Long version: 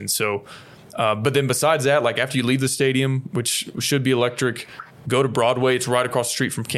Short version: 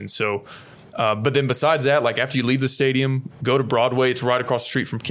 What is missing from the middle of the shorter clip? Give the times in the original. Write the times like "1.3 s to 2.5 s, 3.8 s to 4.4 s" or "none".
3.3 s to 4.9 s